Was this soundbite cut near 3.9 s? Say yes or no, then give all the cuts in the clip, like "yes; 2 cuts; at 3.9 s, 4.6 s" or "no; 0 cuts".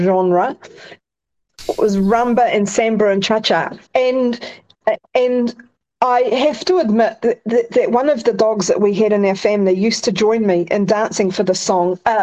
yes; 1 cut; at 3.9 s